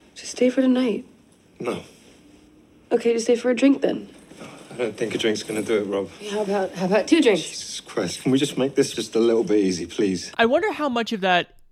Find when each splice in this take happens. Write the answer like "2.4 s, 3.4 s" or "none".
10.3 s